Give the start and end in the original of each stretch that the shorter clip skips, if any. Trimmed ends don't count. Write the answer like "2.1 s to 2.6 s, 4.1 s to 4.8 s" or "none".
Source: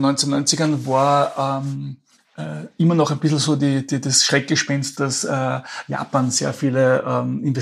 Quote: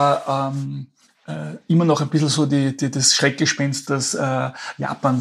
none